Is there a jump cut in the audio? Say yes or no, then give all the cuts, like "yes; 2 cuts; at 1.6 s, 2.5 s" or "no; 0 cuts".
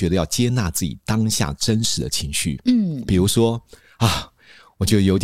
no; 0 cuts